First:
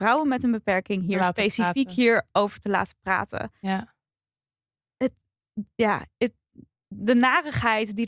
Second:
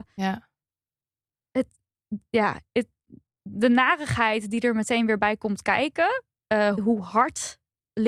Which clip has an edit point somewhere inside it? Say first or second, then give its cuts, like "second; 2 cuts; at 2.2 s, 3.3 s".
second; 1 cut; at 6.7 s